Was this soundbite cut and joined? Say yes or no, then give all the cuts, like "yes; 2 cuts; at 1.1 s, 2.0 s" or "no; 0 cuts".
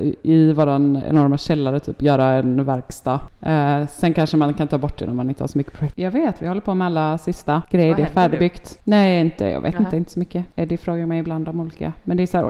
yes; 2 cuts; at 5.9 s, 10.5 s